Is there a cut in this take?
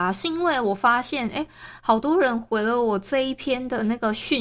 no; 0 cuts

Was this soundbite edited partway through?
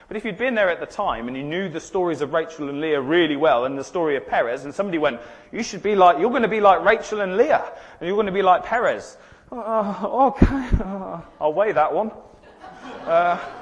no; 0 cuts

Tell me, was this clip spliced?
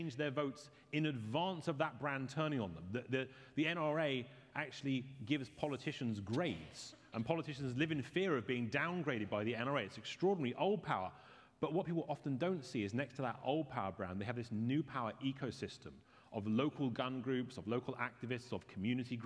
no; 0 cuts

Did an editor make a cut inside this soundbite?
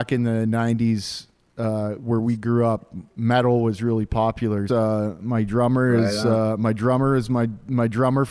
yes; 1 cut; at 4.7 s

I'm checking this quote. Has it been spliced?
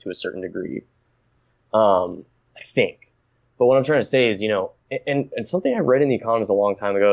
no; 0 cuts

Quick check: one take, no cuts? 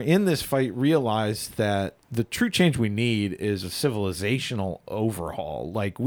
no; 1 cut; at 2.0 s

